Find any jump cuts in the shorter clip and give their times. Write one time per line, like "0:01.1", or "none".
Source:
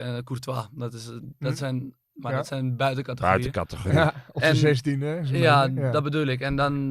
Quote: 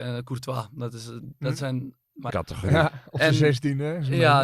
0:02.3